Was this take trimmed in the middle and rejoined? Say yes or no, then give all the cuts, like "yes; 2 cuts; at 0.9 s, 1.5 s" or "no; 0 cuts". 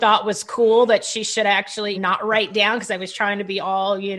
yes; 1 cut; at 1.9 s